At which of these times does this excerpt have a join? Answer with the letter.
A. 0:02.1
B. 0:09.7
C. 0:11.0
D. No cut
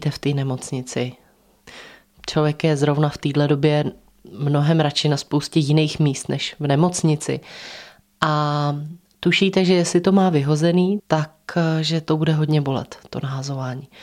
C